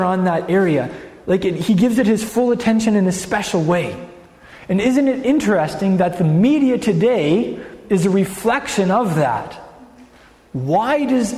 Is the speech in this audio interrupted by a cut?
no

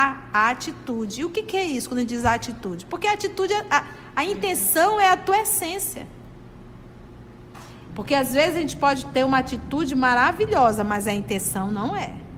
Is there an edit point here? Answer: yes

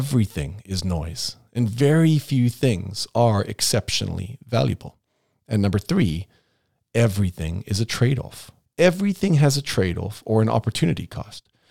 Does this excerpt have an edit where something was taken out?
yes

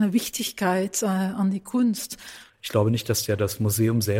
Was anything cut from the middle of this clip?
yes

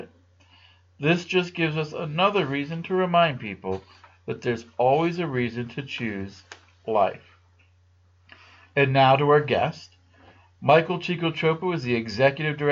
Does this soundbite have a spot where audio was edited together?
no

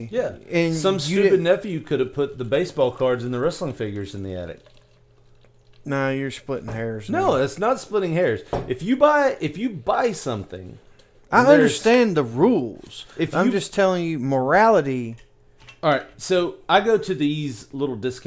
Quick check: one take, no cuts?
yes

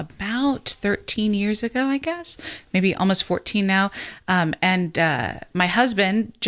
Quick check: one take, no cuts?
yes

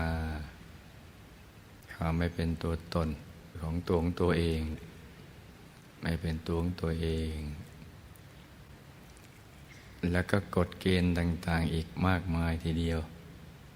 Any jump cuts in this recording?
no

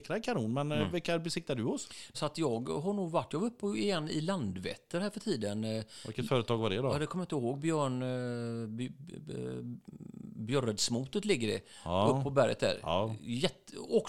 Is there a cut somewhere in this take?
yes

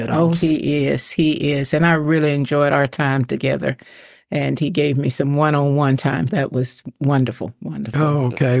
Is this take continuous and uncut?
no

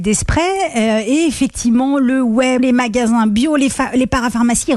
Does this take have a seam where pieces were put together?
yes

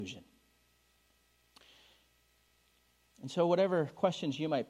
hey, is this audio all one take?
yes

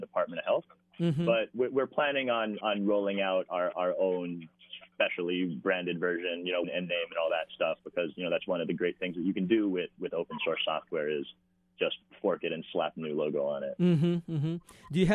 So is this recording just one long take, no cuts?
no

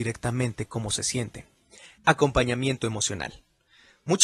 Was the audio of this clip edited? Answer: yes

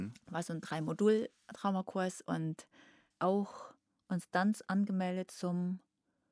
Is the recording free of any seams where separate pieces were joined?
no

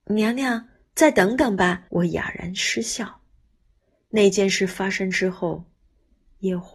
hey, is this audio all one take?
no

